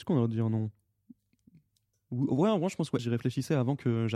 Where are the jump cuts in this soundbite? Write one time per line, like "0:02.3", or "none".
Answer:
0:03.0